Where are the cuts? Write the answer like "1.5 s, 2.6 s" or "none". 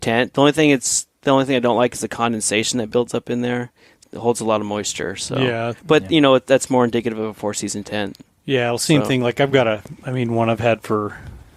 4.0 s